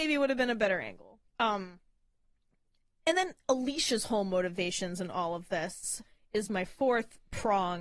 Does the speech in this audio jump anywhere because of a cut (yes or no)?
yes